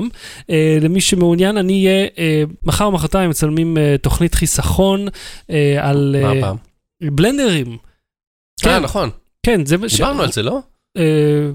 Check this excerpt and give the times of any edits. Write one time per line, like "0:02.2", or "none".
none